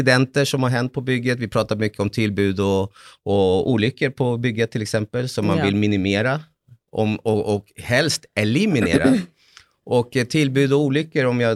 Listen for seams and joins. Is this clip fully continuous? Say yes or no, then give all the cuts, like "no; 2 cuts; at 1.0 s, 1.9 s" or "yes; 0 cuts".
yes; 0 cuts